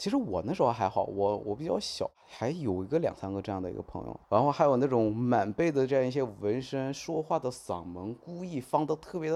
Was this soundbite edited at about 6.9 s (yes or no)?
no